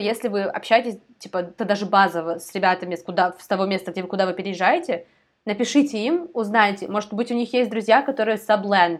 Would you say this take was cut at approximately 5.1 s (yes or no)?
no